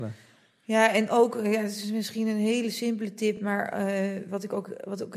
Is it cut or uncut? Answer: uncut